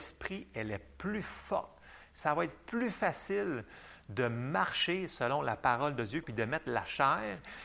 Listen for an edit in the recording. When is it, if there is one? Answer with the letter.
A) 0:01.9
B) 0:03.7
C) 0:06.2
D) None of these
C